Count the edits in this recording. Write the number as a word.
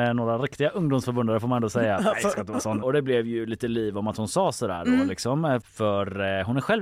two